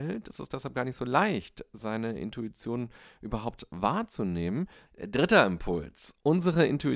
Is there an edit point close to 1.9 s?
no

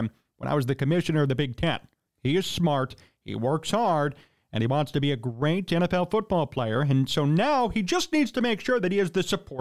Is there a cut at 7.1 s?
no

